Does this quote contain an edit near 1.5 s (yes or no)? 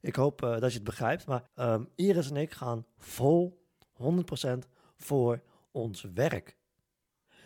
yes